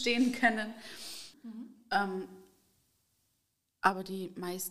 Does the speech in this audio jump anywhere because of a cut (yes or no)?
yes